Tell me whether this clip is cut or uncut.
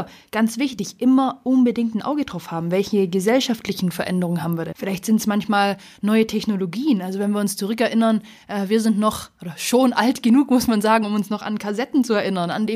cut